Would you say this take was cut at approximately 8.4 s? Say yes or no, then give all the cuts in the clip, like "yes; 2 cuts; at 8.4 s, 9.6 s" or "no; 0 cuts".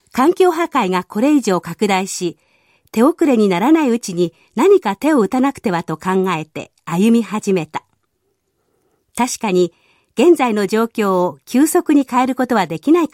no; 0 cuts